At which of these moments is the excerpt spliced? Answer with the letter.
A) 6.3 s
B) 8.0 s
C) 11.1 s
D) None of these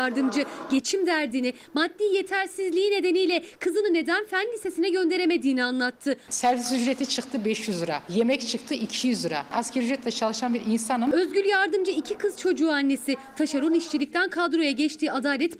A